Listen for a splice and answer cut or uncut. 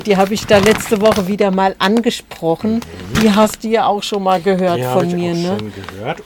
uncut